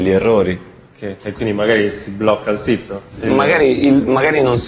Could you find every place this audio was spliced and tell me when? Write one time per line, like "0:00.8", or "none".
none